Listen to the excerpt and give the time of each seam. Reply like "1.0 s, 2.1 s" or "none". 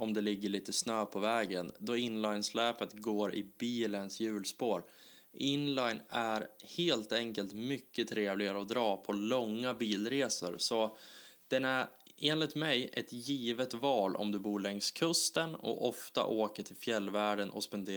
none